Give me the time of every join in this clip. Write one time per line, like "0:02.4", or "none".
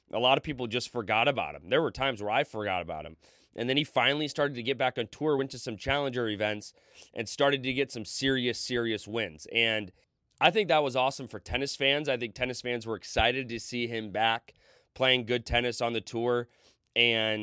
none